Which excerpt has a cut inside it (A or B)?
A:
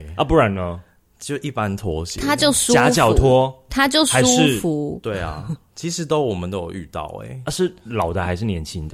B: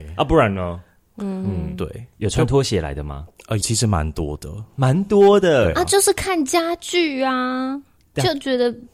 B